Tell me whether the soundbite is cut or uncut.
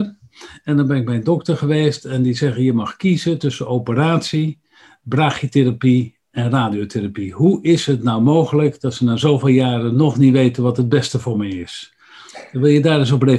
uncut